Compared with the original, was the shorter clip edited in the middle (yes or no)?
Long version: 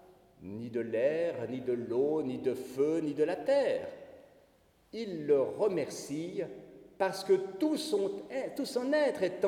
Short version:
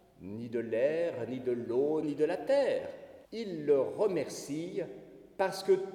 yes